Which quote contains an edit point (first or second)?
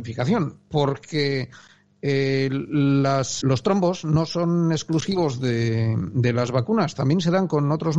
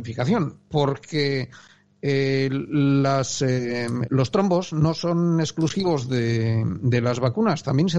first